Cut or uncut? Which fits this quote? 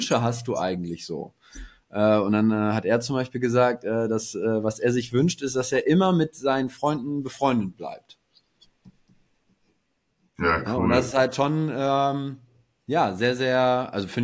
uncut